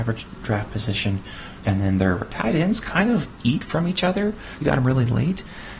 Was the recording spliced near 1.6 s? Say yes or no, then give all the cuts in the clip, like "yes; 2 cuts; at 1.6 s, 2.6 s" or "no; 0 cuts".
yes; 2 cuts; at 1.6 s, 4.6 s